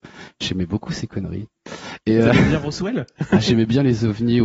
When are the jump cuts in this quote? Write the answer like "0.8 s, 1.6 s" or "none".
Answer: none